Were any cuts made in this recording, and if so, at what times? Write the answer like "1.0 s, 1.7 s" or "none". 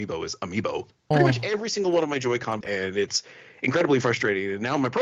1.1 s, 2.6 s